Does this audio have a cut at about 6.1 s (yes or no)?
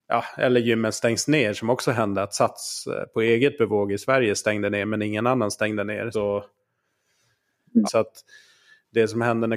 yes